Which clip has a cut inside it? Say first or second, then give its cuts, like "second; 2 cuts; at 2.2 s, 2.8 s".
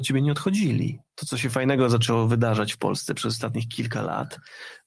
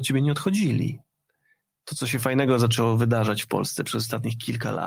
first; 1 cut; at 1.1 s